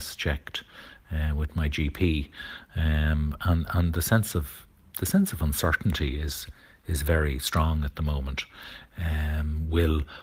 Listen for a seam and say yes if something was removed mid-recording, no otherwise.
yes